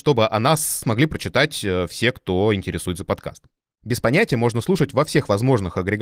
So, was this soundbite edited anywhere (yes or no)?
no